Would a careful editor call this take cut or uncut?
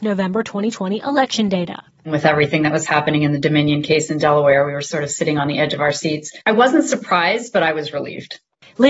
uncut